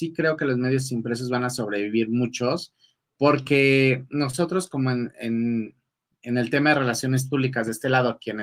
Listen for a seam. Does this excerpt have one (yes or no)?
no